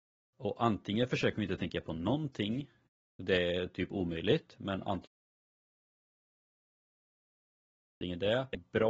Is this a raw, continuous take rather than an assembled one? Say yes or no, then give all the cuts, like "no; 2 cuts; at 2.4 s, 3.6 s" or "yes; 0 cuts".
yes; 0 cuts